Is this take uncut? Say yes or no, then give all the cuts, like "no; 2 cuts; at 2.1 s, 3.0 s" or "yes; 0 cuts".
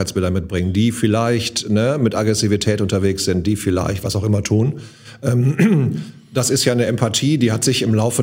yes; 0 cuts